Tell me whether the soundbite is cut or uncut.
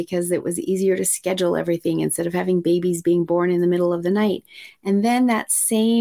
uncut